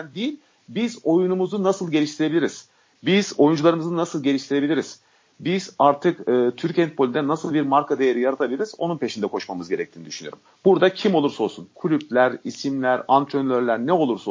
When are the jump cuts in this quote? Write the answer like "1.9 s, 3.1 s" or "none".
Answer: none